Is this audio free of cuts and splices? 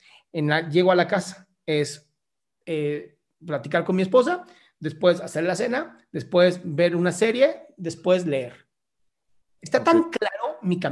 yes; 0 cuts

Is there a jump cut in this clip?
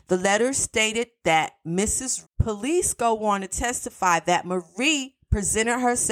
yes; 1 cut; at 2.2 s

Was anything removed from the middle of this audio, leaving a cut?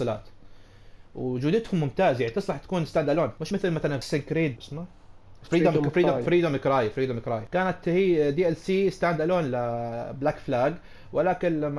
no; 0 cuts

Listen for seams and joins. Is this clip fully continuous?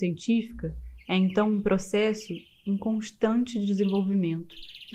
yes; 0 cuts

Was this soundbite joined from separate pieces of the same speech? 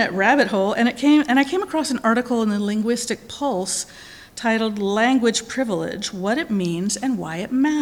no; 0 cuts

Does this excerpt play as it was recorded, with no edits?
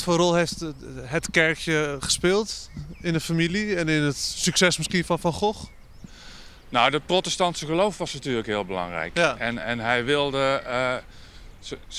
yes; 0 cuts

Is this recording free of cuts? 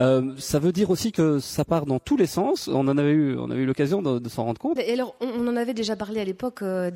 no; 1 cut; at 4.8 s

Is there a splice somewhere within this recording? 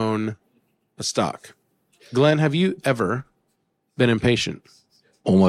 no; 0 cuts

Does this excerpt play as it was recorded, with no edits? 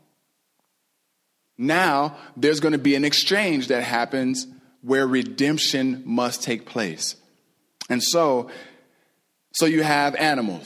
yes; 0 cuts

